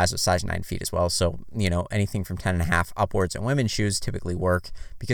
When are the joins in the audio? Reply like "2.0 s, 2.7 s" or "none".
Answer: none